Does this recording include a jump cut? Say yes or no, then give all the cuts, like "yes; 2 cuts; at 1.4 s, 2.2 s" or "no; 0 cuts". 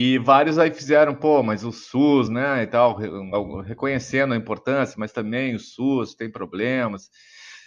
no; 0 cuts